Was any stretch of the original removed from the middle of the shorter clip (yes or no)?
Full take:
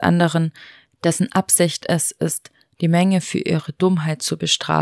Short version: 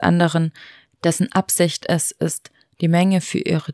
no